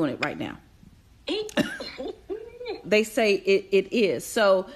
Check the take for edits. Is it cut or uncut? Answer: cut